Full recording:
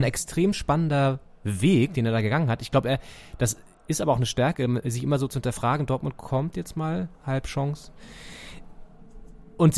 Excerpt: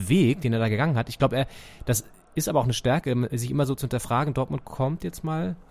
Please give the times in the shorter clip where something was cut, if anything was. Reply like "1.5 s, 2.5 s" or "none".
none